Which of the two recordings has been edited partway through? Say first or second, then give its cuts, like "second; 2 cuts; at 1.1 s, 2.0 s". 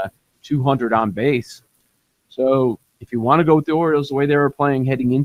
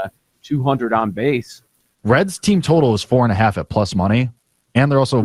second; 1 cut; at 1.9 s